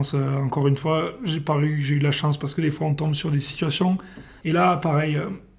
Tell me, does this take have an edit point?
yes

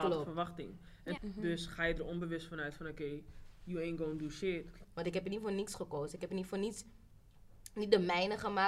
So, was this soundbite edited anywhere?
yes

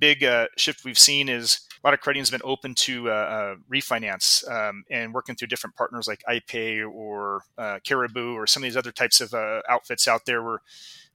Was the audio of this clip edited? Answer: yes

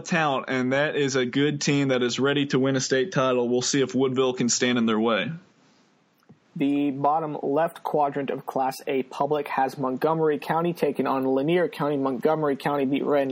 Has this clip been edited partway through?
no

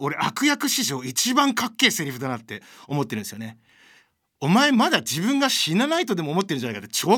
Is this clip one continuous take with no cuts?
yes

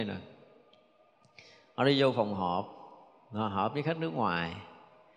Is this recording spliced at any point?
no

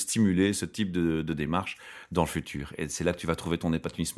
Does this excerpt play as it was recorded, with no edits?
yes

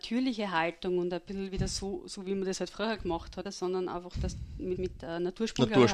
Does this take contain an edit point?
yes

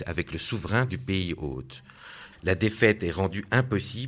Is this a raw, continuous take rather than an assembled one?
no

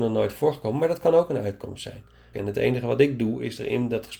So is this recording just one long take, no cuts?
no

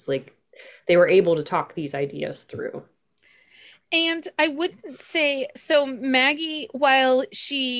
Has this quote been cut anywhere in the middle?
no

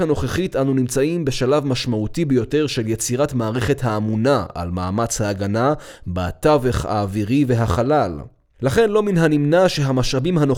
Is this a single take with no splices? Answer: yes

